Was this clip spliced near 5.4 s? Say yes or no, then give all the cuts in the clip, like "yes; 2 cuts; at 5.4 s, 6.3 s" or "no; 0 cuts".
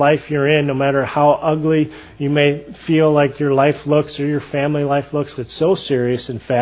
yes; 1 cut; at 5.4 s